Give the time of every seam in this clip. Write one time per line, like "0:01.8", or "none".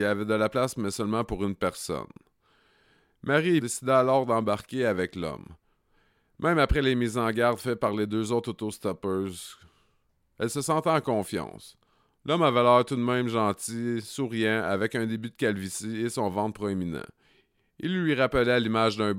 0:03.6